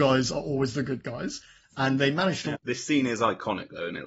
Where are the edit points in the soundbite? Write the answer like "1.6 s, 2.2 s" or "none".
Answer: 2.5 s